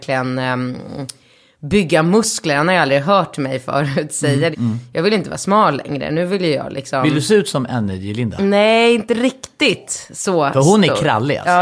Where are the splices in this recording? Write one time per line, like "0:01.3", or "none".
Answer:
0:04.5